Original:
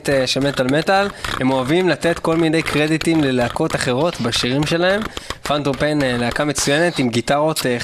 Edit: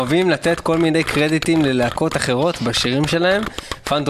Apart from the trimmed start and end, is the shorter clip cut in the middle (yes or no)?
no